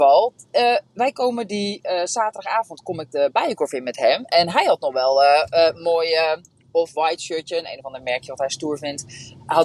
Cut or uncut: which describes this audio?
uncut